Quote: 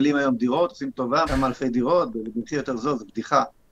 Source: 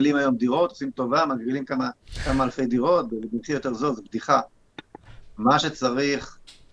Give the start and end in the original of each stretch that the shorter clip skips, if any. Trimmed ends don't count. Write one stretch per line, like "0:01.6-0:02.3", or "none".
0:01.3-0:02.2

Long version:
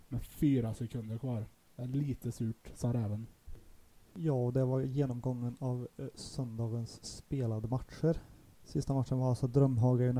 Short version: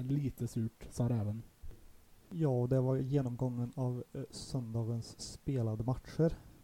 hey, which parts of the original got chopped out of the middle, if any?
none

